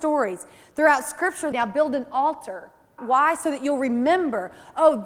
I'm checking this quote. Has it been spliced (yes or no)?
yes